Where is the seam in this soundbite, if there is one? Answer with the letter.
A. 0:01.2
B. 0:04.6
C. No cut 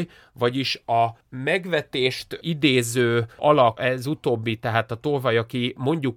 A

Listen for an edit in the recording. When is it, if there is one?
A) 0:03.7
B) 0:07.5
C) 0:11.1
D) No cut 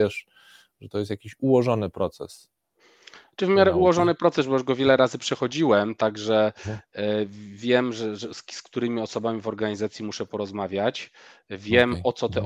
D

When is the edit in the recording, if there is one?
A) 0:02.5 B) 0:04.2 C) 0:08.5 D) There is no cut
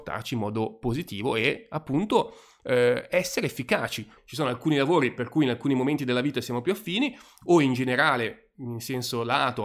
B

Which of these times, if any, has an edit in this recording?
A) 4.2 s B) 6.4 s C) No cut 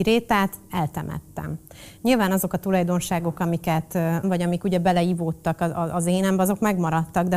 A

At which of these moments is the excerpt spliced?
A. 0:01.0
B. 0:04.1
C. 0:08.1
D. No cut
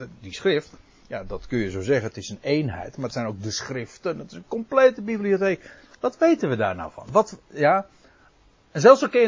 D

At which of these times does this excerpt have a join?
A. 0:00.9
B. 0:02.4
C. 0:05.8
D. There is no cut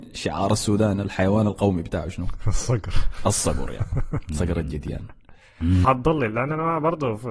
C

